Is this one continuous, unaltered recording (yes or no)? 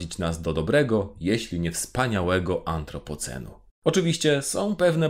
no